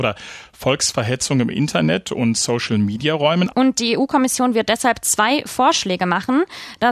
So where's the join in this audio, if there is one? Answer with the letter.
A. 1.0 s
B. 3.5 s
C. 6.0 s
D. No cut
B